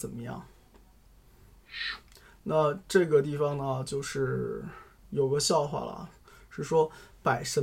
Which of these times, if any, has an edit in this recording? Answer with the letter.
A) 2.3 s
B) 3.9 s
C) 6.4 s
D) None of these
D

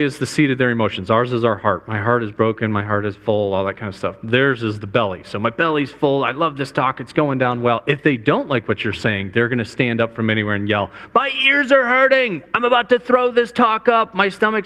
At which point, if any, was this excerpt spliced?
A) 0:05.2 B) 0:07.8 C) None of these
C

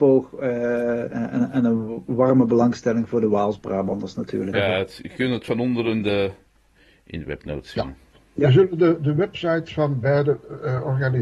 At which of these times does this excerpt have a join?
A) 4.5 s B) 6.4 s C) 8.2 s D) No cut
A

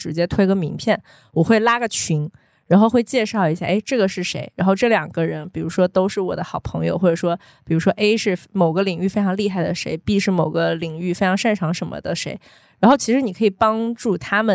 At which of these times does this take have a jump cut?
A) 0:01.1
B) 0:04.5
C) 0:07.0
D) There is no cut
B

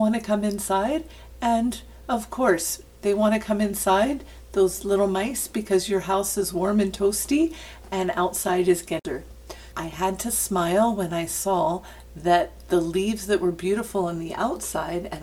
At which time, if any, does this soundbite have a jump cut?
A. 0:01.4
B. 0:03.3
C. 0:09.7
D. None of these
C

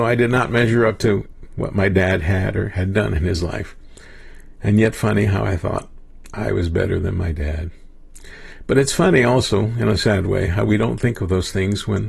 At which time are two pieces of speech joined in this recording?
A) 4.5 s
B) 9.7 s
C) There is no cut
C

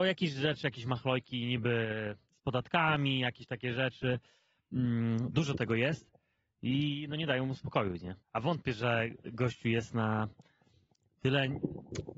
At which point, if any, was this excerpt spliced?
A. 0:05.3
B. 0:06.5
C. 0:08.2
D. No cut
C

